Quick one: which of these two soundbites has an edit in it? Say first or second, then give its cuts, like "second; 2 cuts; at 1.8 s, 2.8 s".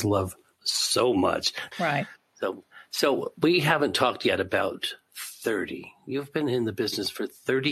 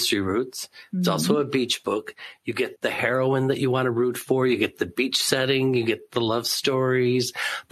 first; 1 cut; at 1.7 s